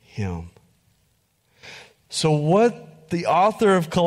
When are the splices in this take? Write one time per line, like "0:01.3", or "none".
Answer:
none